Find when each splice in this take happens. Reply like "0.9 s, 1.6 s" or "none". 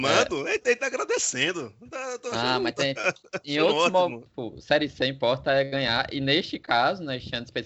4.3 s

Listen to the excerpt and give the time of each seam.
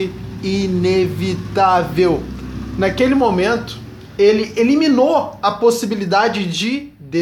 4.2 s

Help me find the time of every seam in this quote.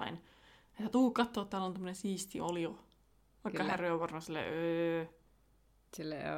3.4 s

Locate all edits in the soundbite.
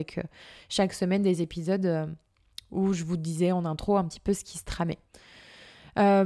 none

